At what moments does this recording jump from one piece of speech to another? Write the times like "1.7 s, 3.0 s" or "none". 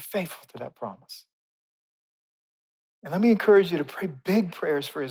none